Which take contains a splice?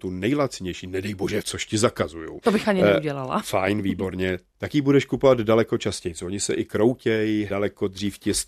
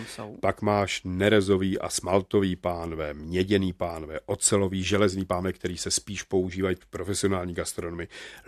first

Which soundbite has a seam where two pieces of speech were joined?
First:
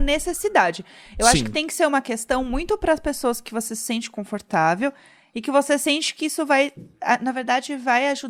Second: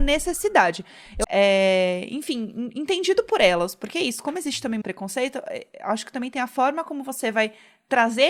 second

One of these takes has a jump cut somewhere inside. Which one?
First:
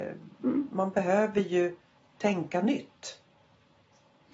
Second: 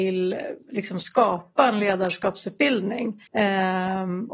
second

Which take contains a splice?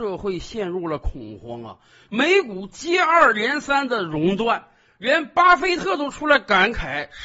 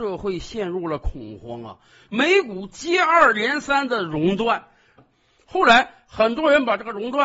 second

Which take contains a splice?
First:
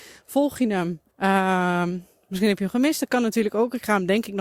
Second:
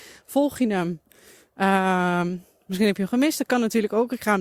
first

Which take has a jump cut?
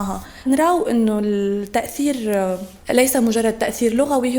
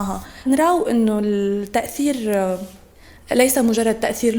first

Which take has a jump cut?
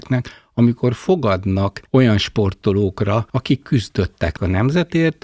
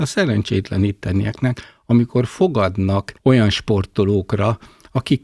first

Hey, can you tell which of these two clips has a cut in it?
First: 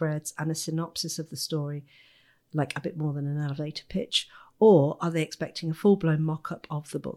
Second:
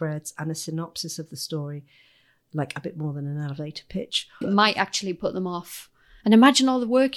second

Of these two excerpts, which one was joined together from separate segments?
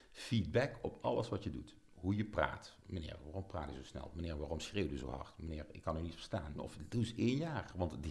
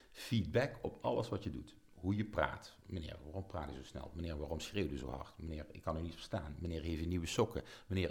first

